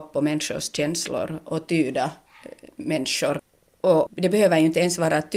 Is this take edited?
yes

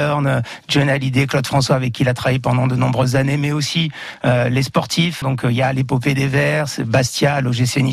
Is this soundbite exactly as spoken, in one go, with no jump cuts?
no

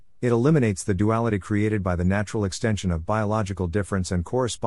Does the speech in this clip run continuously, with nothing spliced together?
yes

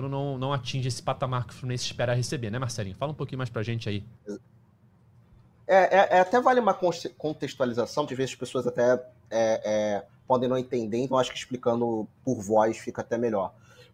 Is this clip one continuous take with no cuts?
no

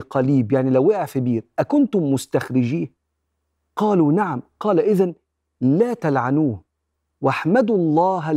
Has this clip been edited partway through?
no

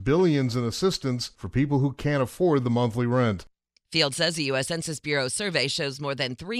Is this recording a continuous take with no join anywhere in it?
yes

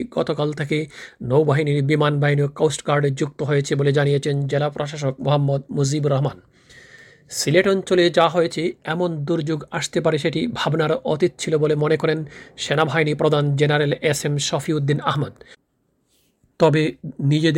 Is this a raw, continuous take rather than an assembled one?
yes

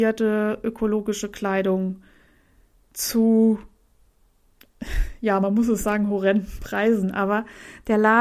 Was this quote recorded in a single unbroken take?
yes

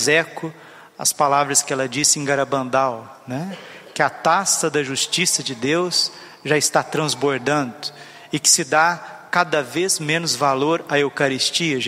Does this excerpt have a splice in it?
no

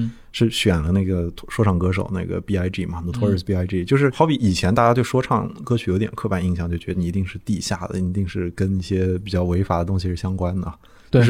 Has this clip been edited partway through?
no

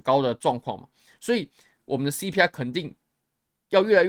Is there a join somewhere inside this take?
no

